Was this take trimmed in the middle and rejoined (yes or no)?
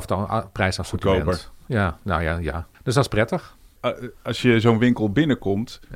yes